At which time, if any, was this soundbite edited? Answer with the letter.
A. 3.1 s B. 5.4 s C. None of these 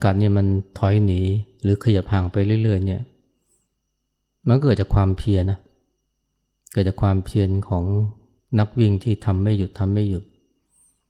B